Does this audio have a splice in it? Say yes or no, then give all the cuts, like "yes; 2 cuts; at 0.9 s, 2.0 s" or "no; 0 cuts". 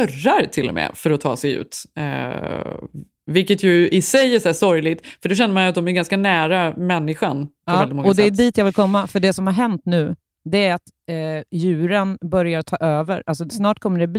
no; 0 cuts